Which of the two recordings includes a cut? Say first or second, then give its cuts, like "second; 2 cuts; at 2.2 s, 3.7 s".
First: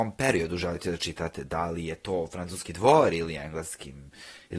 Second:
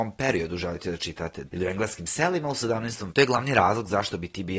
second; 2 cuts; at 1.5 s, 3.1 s